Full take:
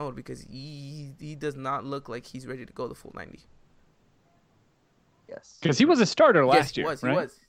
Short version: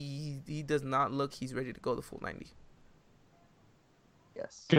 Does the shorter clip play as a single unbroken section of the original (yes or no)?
no